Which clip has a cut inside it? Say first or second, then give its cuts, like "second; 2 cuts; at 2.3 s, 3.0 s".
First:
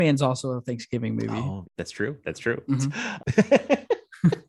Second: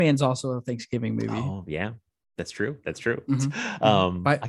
first; 2 cuts; at 1.6 s, 3.2 s